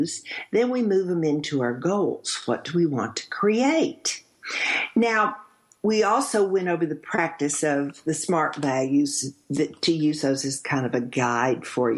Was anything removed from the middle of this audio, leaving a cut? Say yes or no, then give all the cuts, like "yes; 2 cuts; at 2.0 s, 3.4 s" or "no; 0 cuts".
no; 0 cuts